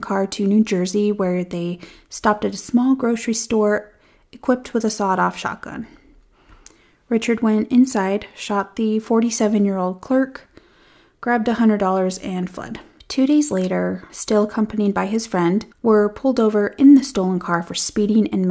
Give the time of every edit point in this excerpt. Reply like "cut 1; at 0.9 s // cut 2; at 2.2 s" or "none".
cut 1; at 14.1 s // cut 2; at 15.7 s